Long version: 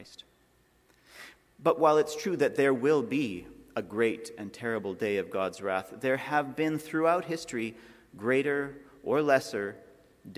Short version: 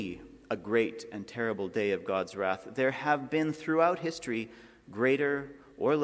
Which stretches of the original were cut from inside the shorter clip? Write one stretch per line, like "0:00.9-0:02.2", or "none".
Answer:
none